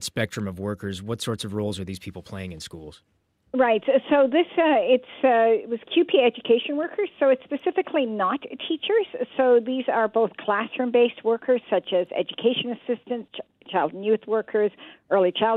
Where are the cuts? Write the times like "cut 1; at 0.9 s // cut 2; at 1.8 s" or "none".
none